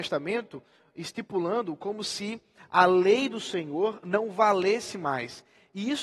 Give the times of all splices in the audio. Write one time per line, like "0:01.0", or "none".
none